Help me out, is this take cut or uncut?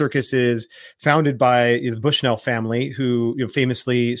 uncut